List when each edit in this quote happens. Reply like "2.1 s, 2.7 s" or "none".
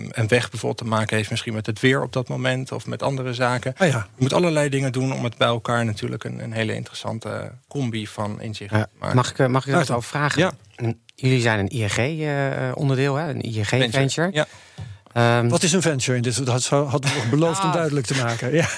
none